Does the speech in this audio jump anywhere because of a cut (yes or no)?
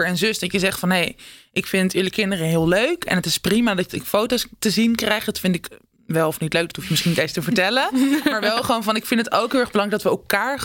no